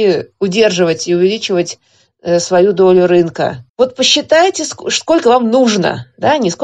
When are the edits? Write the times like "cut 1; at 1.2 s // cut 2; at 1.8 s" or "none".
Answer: cut 1; at 3.7 s